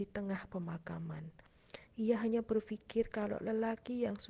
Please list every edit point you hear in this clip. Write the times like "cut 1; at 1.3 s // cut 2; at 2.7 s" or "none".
cut 1; at 1.9 s